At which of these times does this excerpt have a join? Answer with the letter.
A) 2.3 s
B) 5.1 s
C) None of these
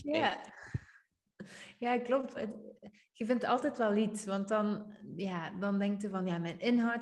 A